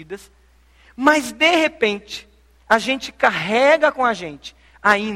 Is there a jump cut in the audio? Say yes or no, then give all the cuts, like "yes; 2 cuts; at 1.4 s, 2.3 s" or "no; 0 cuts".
no; 0 cuts